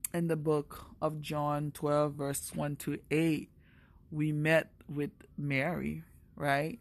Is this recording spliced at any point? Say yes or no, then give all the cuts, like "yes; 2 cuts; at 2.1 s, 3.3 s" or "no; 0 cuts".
no; 0 cuts